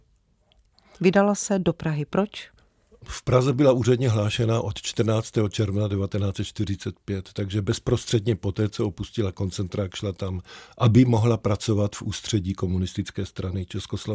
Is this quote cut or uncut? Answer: uncut